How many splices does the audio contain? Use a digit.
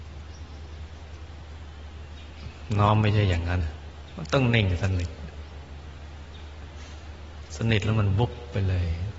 1